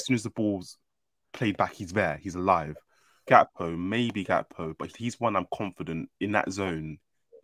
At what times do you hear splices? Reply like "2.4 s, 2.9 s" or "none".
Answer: 3.3 s, 4.9 s

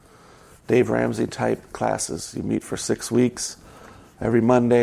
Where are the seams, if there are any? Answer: none

